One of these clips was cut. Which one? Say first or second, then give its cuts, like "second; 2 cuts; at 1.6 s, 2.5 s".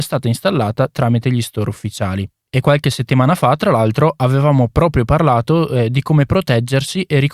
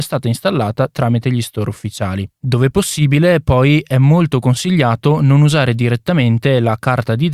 second; 1 cut; at 2.4 s